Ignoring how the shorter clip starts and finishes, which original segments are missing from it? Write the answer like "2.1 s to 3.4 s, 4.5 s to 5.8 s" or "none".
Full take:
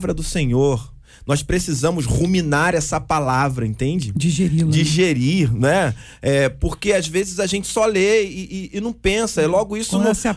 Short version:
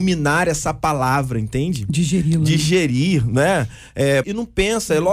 6.5 s to 8.7 s